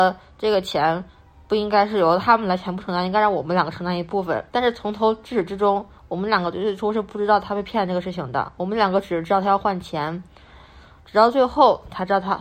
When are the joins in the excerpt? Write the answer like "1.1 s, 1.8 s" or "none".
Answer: 4.5 s